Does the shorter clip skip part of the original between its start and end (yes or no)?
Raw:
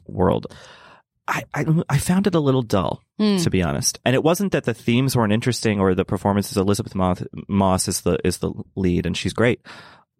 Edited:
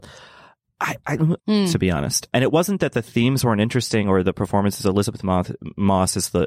yes